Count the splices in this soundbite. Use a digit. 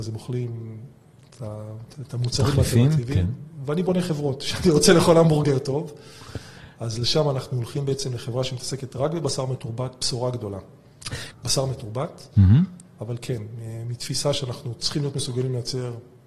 2